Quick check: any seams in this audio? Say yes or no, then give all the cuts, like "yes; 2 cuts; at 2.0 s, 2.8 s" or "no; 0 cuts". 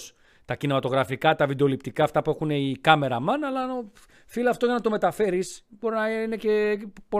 no; 0 cuts